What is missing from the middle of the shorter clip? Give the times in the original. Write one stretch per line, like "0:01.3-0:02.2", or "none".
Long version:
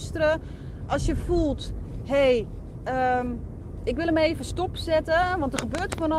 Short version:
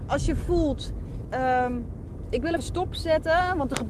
0:02.0-0:02.8
0:04.1-0:04.4